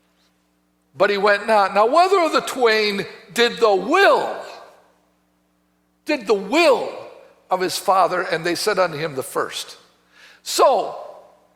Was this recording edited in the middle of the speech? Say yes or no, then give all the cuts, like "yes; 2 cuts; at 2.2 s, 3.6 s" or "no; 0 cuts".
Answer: no; 0 cuts